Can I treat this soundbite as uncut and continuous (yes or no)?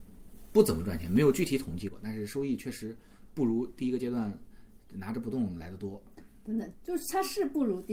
no